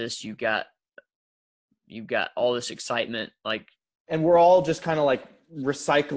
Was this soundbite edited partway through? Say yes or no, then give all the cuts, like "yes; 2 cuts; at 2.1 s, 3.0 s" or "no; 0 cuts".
no; 0 cuts